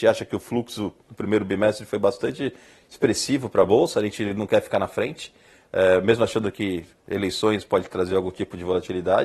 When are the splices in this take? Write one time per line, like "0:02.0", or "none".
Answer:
none